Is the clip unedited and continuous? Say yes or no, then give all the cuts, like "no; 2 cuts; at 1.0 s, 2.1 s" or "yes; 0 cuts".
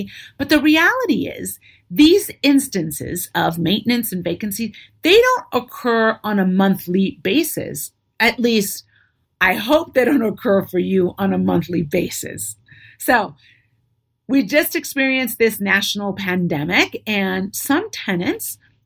yes; 0 cuts